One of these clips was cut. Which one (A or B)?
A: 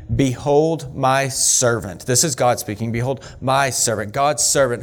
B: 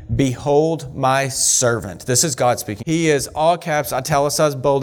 B